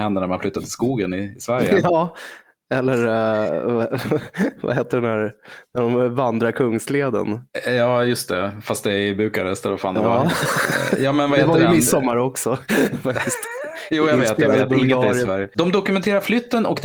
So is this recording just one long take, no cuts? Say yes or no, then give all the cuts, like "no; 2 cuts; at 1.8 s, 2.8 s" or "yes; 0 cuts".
yes; 0 cuts